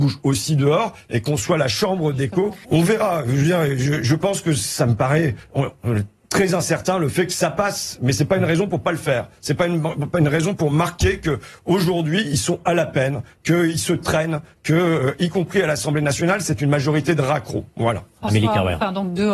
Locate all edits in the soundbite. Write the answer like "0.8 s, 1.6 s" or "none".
2.6 s